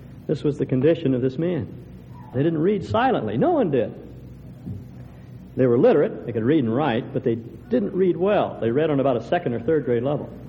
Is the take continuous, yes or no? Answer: no